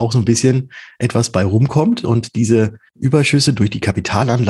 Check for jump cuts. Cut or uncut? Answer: cut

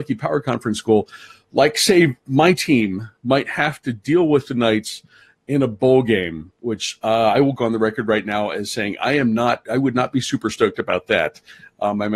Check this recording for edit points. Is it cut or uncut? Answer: uncut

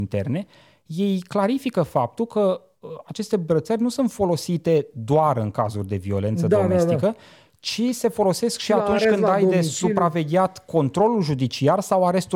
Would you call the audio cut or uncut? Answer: uncut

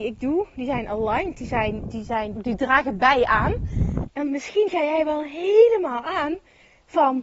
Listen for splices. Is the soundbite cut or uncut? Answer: cut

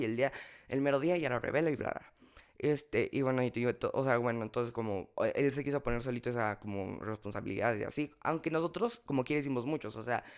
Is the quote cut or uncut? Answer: uncut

